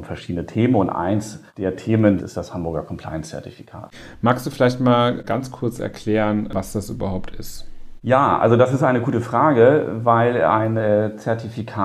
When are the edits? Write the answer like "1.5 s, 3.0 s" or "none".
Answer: 2.2 s